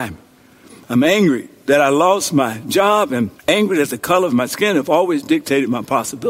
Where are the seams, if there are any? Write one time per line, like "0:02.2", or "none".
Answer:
0:03.4